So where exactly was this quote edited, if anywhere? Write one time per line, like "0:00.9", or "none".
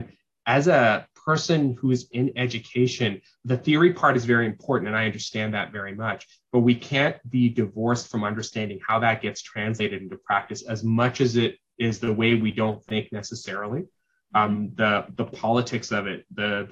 0:03.3